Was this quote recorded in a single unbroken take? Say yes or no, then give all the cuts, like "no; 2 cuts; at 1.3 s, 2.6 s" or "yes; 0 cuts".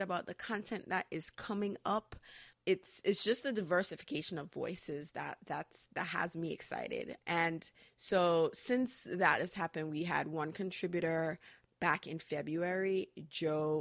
no; 1 cut; at 7.2 s